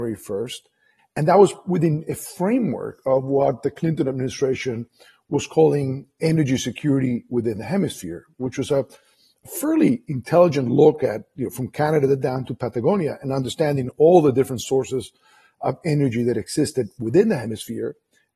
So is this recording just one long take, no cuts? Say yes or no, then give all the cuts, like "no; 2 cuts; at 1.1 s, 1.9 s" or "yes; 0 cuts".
no; 1 cut; at 1.0 s